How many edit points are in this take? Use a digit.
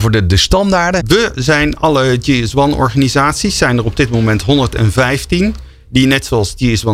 1